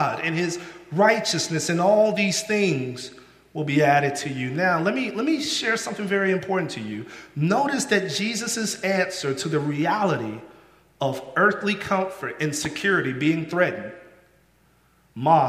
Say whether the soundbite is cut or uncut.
uncut